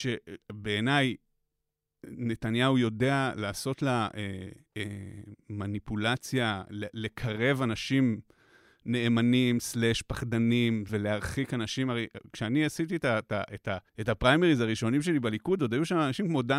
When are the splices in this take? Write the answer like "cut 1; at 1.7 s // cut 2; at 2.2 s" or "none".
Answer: cut 1; at 10.9 s // cut 2; at 13.9 s